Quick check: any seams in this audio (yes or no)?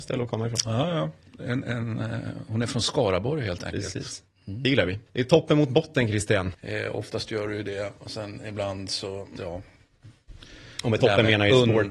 yes